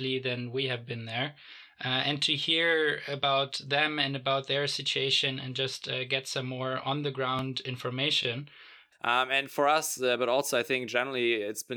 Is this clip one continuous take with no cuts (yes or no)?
no